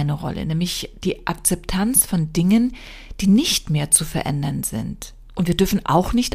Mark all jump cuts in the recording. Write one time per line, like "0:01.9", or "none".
0:05.3